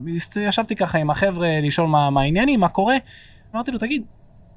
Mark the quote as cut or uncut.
cut